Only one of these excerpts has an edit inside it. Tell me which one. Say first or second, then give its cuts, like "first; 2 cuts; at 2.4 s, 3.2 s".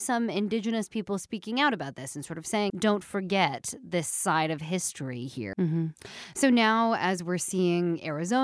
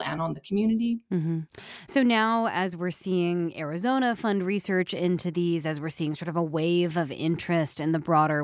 first; 2 cuts; at 2.7 s, 5.5 s